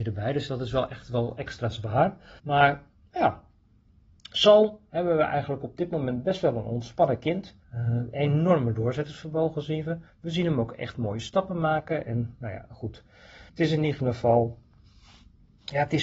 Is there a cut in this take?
yes; 3 cuts; at 2.4 s, 7.6 s, 13.5 s

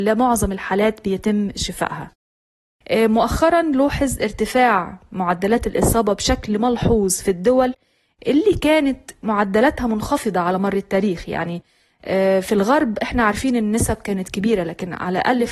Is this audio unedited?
yes; 0 cuts

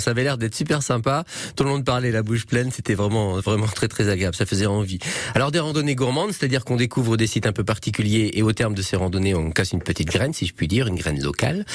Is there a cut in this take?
no; 0 cuts

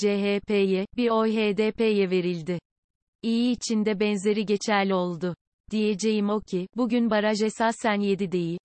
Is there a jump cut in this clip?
no; 0 cuts

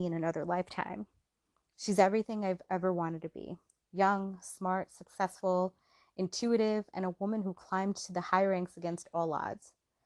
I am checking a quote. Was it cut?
no; 0 cuts

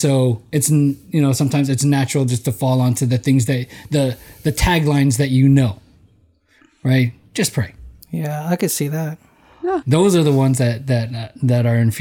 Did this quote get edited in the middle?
yes; 1 cut; at 9.8 s

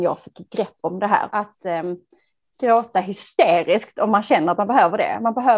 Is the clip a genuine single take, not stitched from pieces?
no; 1 cut; at 1.3 s

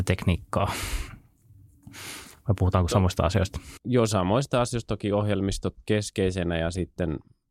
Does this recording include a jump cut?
no; 0 cuts

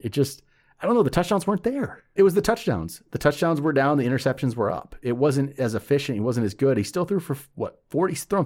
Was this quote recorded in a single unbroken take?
no; 1 cut; at 2.2 s

